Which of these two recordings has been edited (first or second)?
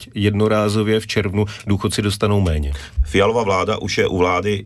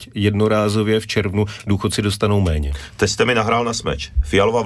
first